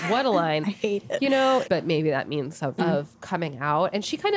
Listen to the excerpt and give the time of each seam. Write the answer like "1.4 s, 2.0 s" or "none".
1.6 s, 2.8 s